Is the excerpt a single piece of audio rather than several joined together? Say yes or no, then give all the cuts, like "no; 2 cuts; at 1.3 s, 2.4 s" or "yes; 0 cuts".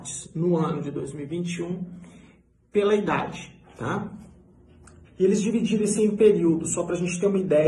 no; 1 cut; at 5.0 s